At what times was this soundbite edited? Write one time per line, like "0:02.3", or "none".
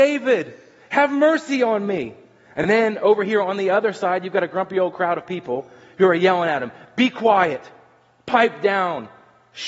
none